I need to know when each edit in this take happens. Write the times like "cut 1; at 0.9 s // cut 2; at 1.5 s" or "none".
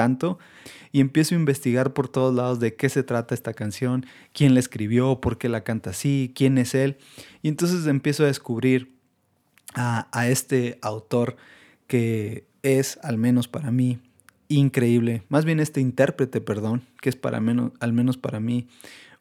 none